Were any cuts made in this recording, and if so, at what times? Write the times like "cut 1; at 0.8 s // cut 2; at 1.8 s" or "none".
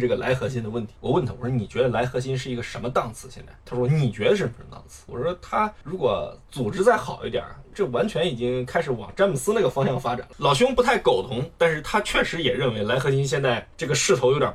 cut 1; at 3.6 s